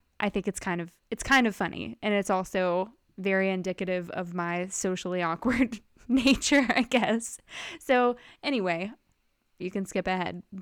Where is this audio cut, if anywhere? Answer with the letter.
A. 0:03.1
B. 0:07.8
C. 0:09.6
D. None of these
C